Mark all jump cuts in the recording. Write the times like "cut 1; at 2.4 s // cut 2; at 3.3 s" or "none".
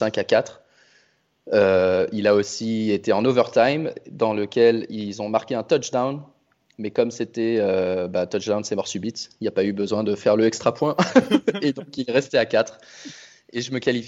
none